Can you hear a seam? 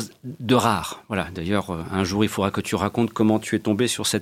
no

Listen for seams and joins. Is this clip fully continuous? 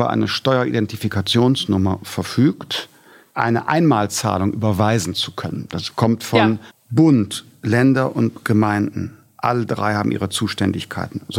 no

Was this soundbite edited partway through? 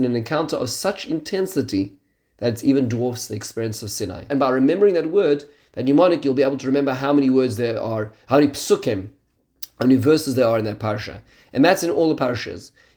yes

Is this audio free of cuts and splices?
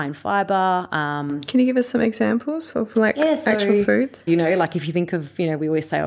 no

